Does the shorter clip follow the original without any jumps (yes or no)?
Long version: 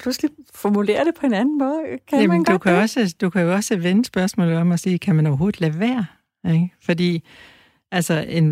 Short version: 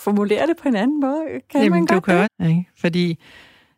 no